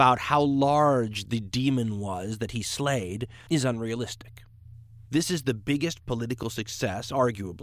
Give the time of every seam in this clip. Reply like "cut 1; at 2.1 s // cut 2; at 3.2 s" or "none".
cut 1; at 3.5 s // cut 2; at 5.1 s